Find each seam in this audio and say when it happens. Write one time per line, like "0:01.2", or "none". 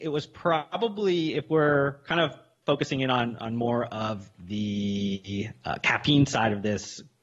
none